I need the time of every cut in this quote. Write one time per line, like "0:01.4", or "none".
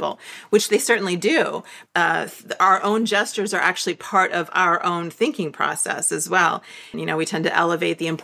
0:01.9
0:06.9